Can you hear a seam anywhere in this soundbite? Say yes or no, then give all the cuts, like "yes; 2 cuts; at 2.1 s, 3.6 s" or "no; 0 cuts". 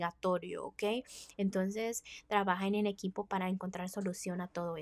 no; 0 cuts